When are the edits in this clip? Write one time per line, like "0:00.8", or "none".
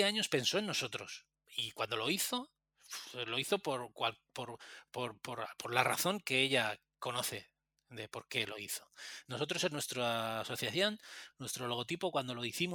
0:01.5